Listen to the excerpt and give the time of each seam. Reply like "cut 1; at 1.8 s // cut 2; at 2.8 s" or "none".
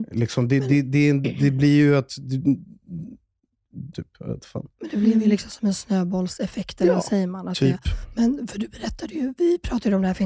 cut 1; at 3.9 s